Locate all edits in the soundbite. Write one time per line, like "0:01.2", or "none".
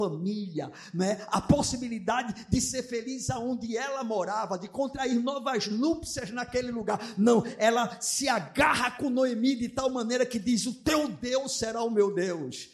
none